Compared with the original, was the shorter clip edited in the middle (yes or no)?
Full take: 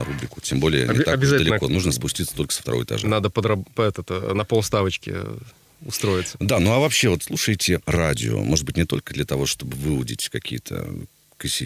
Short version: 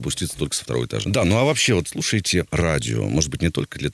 yes